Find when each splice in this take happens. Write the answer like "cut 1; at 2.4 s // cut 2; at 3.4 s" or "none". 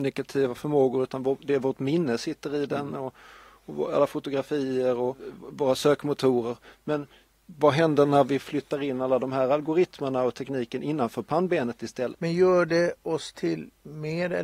cut 1; at 12.1 s